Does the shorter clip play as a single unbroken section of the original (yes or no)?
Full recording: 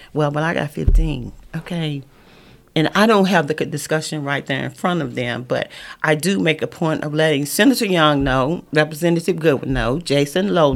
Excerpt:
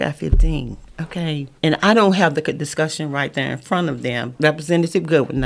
no